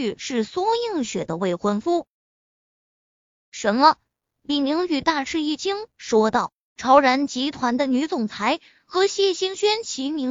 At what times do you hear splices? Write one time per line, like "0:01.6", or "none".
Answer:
none